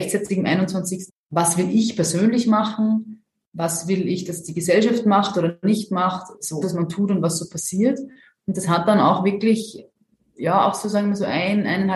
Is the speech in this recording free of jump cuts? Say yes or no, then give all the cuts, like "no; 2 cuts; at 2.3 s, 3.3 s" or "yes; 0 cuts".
no; 2 cuts; at 1.1 s, 6.6 s